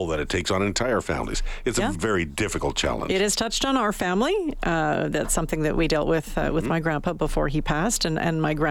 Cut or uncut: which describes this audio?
cut